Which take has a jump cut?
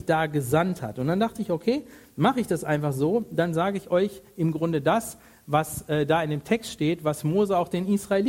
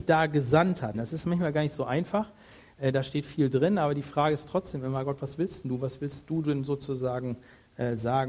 second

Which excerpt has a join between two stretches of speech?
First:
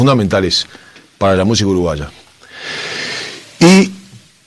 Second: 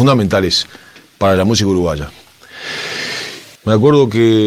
second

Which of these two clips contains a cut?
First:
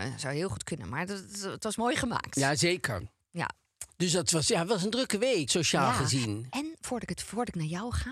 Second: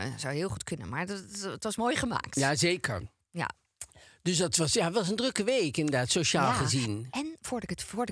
first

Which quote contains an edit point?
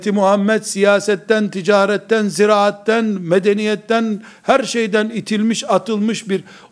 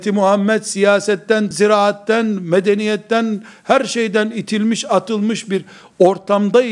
second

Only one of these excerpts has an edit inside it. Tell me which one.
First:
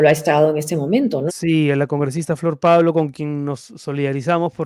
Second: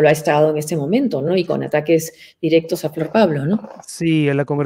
first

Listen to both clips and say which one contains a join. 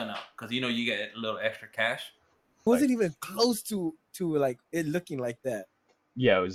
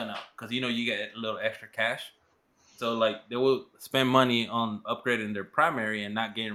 first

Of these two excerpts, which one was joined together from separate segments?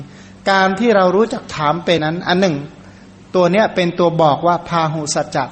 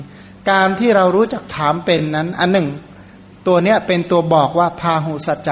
first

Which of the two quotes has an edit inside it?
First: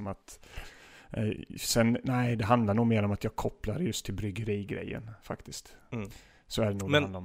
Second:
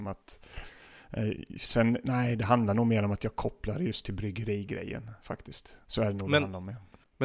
second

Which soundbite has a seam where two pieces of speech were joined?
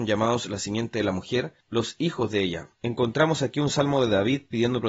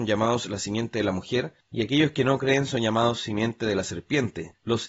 first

